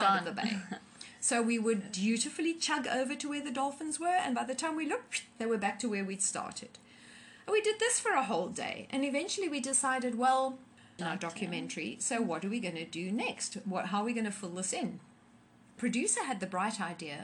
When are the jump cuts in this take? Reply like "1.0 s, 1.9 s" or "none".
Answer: 11.0 s